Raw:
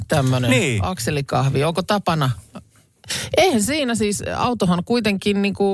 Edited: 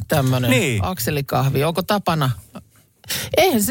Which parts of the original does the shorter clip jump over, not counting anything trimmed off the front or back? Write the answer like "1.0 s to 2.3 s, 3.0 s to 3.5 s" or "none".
none